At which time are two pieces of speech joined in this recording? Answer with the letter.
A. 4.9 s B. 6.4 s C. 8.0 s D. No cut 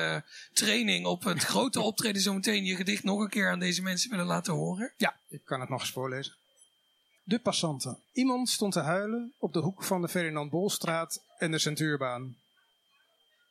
C